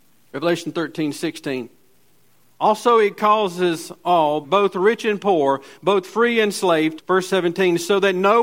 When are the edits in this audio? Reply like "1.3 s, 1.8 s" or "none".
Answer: 4.4 s, 7.0 s